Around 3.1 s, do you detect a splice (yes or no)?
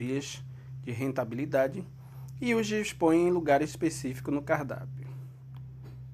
no